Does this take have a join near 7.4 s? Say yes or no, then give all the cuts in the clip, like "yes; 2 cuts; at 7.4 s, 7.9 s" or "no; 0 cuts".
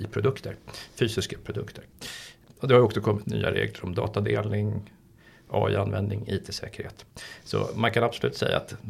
no; 1 cut; at 3.2 s